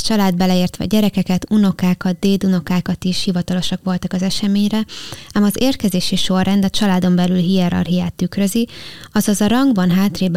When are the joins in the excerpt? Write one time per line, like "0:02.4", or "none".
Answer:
none